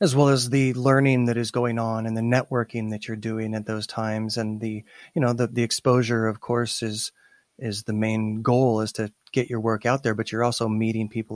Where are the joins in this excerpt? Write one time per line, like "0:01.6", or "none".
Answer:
none

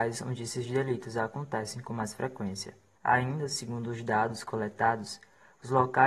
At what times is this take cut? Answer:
0:03.0

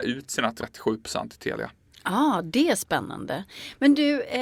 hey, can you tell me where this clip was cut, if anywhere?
none

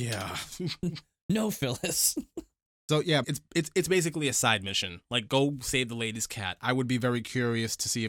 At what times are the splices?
0:03.2

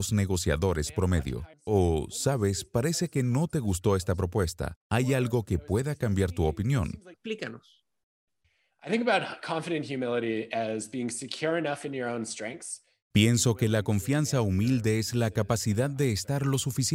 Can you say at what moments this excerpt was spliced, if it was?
0:01.5
0:07.1

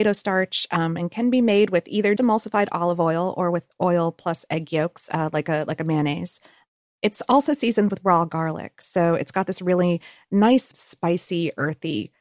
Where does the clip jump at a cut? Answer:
0:02.2
0:10.7

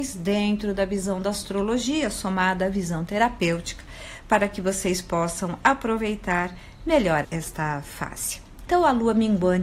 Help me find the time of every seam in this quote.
0:07.2
0:08.7

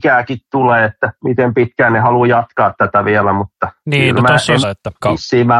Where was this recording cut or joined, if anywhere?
0:04.6

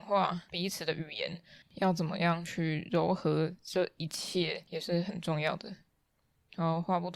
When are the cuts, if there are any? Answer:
0:01.6

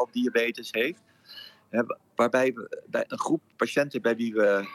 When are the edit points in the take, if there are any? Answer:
none

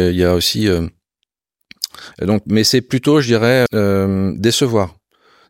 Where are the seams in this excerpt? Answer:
0:02.1
0:03.7

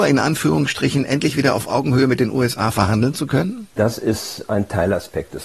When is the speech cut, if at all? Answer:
0:03.7

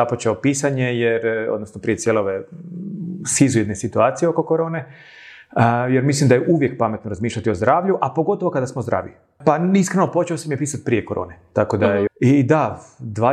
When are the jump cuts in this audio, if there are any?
0:09.4
0:12.1

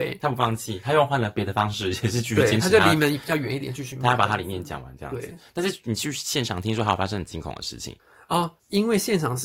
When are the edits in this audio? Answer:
none

